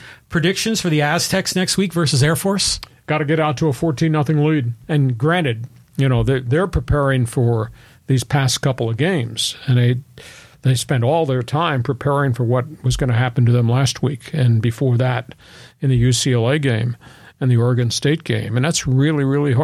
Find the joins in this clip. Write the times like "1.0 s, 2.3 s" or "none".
4.8 s